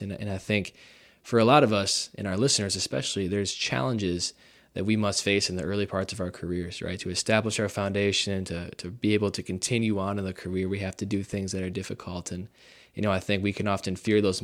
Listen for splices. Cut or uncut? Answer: uncut